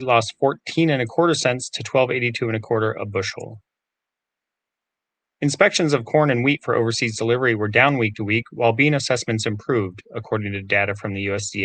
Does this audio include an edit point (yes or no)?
no